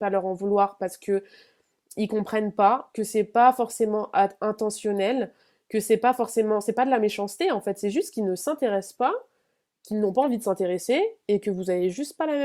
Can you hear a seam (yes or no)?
no